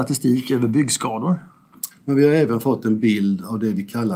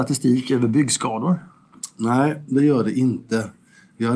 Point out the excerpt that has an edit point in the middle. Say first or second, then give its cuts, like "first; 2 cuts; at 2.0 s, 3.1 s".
first; 1 cut; at 1.9 s